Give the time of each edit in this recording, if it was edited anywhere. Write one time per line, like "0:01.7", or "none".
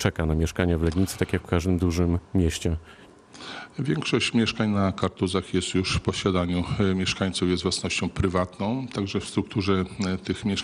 none